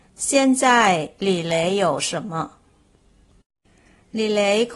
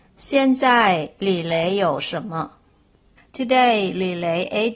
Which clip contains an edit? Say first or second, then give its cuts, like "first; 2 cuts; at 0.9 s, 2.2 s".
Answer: second; 1 cut; at 3.2 s